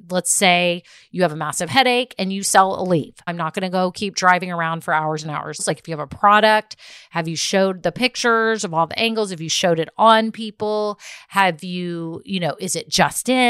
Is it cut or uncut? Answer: cut